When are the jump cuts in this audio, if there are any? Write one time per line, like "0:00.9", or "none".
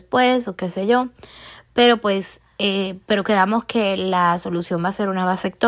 none